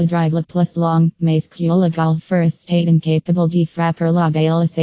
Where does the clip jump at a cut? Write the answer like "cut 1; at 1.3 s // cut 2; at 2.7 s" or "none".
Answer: none